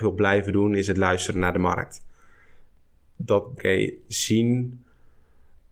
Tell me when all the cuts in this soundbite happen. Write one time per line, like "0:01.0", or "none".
0:03.6